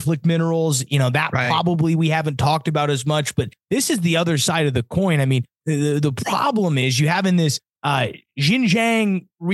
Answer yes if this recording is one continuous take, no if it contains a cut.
yes